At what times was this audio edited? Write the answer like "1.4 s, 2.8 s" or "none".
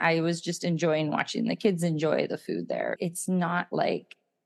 3.0 s